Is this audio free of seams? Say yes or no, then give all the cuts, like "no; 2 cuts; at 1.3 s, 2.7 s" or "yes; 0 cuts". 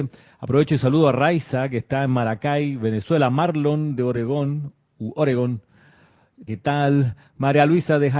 no; 1 cut; at 6.5 s